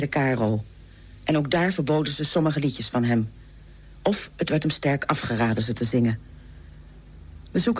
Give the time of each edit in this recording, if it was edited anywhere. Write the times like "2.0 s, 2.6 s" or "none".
none